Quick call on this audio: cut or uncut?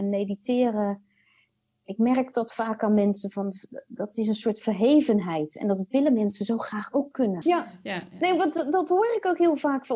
cut